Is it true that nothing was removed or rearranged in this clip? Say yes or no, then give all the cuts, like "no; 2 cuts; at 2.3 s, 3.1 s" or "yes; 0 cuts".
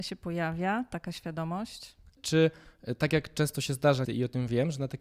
no; 2 cuts; at 2.2 s, 4.1 s